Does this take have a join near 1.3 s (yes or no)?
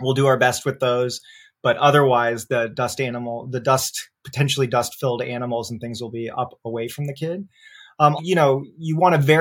no